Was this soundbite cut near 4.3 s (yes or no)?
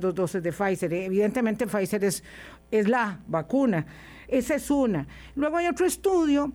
yes